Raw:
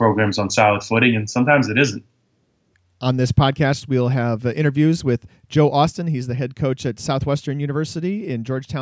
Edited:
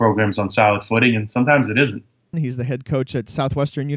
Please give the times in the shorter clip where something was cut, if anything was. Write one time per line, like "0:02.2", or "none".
0:02.3